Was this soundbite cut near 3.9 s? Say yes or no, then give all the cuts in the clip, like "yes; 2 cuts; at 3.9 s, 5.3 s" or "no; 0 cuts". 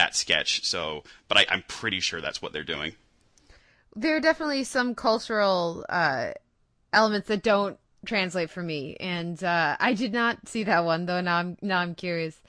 no; 0 cuts